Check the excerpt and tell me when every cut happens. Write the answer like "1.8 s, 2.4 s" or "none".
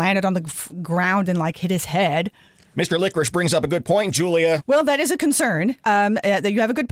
4.6 s